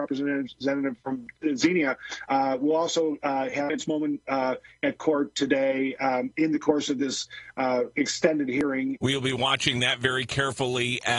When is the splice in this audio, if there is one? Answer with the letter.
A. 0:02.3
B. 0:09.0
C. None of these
B